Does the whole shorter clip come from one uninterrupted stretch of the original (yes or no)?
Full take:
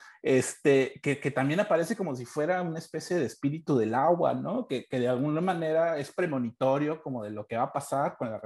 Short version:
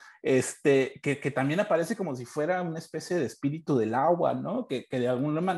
yes